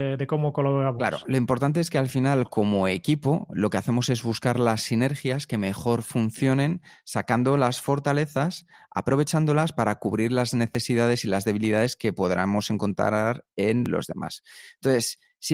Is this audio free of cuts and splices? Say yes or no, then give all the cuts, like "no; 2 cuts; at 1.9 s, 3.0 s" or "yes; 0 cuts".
yes; 0 cuts